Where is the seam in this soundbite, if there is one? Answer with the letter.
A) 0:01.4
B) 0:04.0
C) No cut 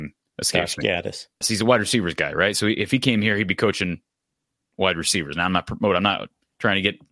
A